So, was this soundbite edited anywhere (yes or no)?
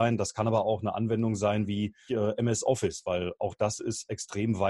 yes